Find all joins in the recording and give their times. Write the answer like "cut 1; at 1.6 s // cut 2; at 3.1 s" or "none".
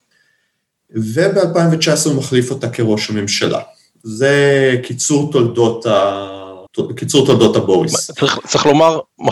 cut 1; at 6.7 s